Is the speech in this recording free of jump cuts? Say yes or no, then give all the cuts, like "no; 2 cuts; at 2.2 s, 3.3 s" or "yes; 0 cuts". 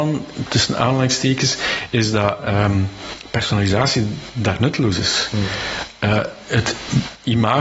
yes; 0 cuts